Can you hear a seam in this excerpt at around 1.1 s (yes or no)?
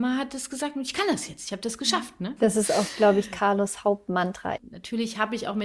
no